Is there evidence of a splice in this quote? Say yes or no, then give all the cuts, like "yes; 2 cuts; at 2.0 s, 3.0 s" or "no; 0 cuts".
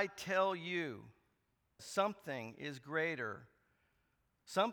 yes; 1 cut; at 1.8 s